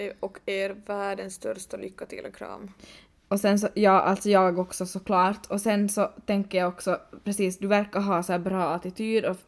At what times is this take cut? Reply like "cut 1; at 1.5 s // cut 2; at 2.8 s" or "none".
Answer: none